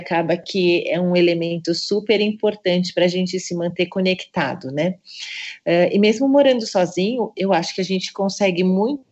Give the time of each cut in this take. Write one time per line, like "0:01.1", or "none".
none